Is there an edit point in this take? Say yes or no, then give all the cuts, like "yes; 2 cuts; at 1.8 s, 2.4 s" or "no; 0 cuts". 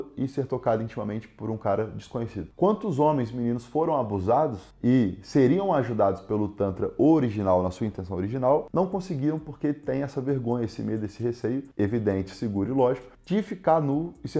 yes; 1 cut; at 2.5 s